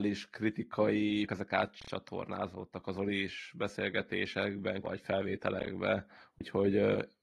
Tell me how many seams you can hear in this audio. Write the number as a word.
two